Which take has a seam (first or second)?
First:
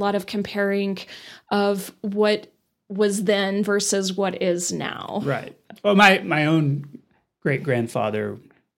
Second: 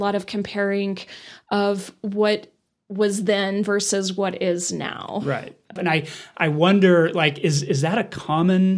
second